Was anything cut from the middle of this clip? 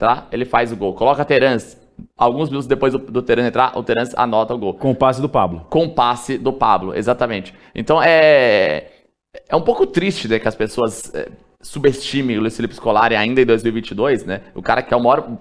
no; 0 cuts

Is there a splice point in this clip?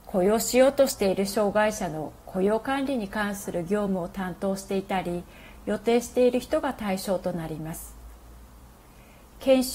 no; 0 cuts

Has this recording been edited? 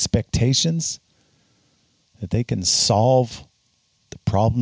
no; 0 cuts

